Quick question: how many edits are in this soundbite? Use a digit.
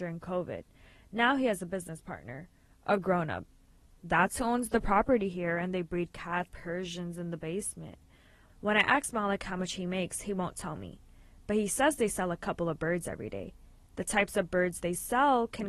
1